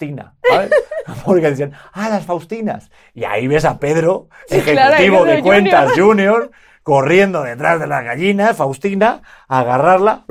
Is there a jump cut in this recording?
no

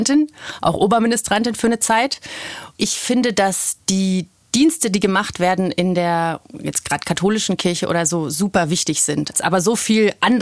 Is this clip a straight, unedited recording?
no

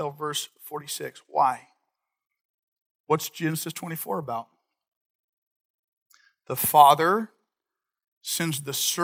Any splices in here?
no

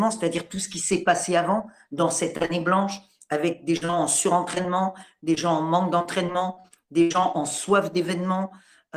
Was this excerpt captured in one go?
yes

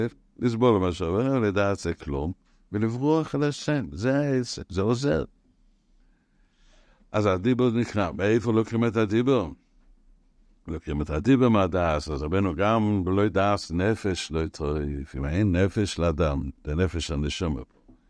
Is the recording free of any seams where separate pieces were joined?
yes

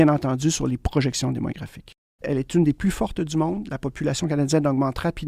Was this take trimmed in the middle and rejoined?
yes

